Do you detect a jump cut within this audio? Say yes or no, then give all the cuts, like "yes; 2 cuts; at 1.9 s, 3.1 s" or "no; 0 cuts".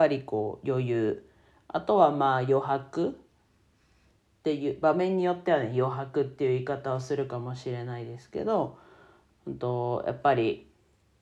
no; 0 cuts